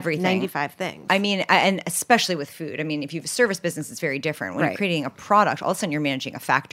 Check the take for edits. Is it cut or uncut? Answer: uncut